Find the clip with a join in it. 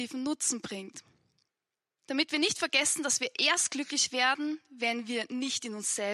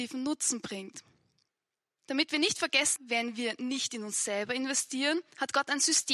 second; 1 cut; at 3.0 s

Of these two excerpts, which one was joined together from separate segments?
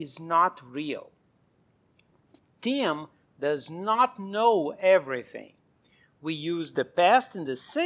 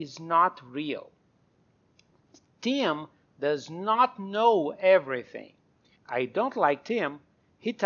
second; 1 cut; at 6.0 s

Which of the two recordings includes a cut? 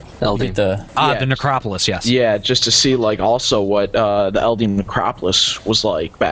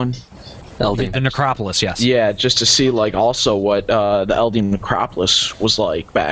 second; 1 cut; at 1.1 s

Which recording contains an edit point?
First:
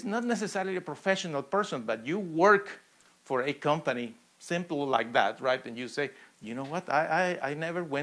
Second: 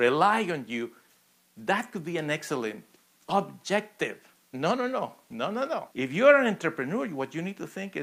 second; 2 cuts; at 4.5 s, 5.9 s

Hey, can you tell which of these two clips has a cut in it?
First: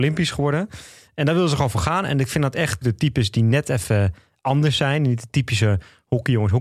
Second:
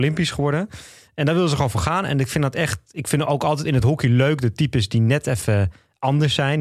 first; 1 cut; at 2.8 s

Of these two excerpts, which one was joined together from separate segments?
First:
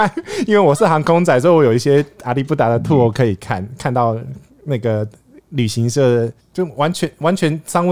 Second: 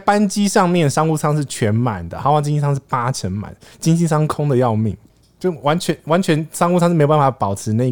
first; 1 cut; at 6.4 s

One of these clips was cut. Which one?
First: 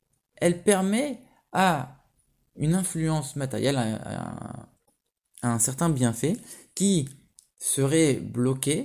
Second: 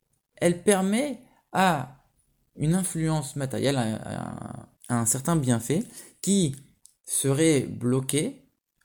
second; 1 cut; at 4.8 s

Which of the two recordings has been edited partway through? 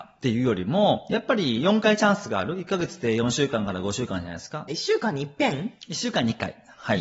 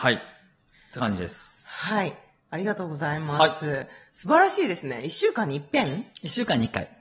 first; 1 cut; at 4.7 s

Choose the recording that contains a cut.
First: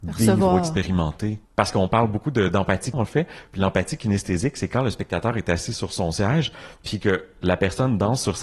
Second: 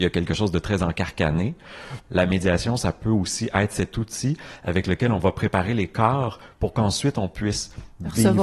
first; 2 cuts; at 1.4 s, 2.9 s

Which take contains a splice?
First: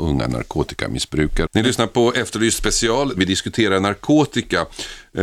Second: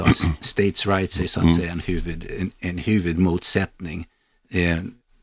first; 2 cuts; at 1.5 s, 3.2 s

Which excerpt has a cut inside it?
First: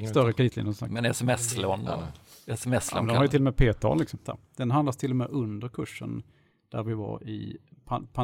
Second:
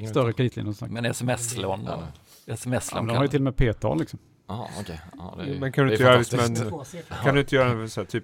first; 1 cut; at 4.3 s

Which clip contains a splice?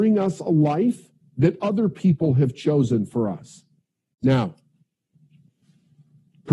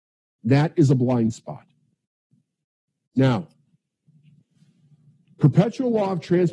first; 1 cut; at 4.1 s

